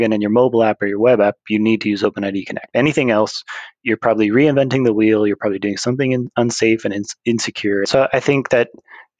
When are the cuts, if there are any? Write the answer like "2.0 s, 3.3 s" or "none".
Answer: 7.8 s